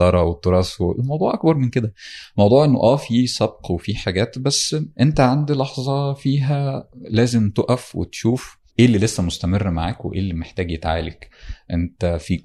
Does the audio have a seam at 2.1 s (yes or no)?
no